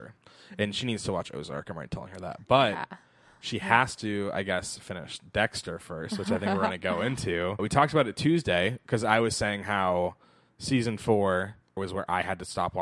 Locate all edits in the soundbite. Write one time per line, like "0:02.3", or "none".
0:07.6
0:11.8